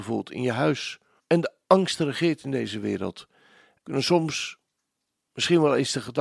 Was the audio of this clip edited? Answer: yes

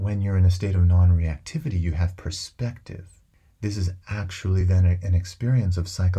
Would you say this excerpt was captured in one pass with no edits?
yes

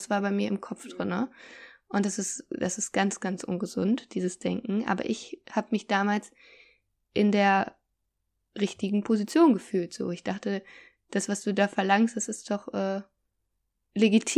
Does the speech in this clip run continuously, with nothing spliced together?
yes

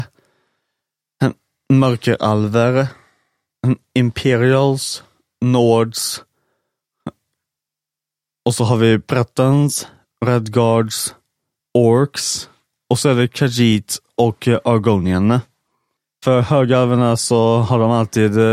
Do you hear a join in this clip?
no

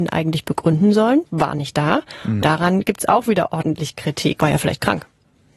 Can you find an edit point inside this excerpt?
yes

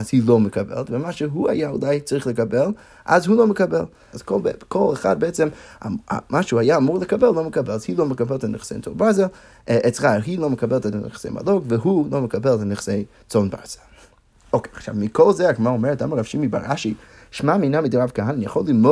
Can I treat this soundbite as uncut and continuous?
no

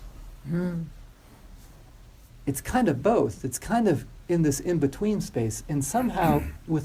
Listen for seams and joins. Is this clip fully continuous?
yes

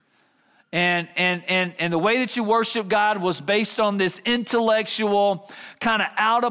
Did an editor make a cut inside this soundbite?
no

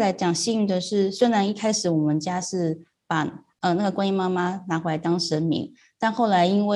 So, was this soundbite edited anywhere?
no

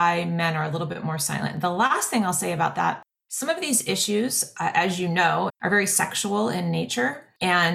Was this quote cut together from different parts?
yes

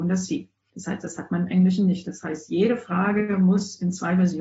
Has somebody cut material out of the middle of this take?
no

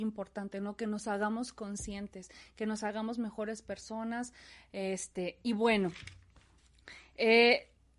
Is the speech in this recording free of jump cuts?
yes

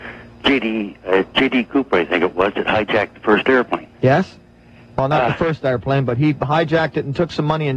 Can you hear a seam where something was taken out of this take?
no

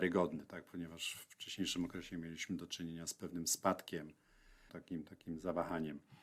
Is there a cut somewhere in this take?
yes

